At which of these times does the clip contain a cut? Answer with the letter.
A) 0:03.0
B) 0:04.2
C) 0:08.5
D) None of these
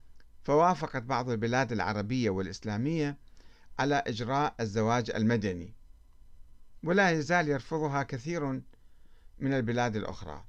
D